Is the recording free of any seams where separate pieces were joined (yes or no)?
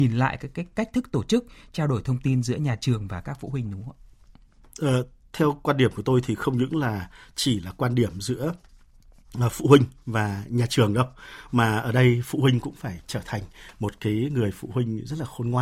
yes